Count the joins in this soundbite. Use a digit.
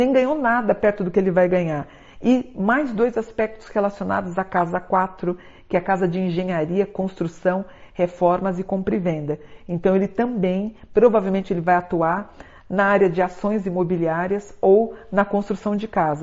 0